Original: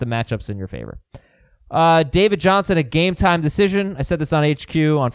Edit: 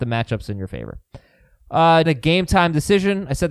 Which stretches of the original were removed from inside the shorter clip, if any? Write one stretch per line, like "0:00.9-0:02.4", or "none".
0:02.1-0:02.7